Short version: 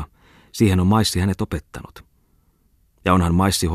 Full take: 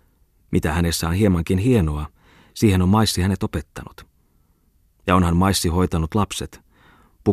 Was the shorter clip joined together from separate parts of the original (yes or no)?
no